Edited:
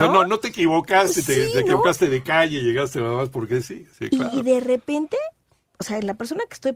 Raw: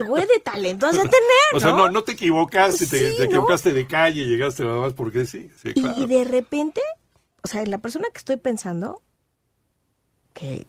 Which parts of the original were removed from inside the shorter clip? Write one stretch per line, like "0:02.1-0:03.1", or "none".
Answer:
none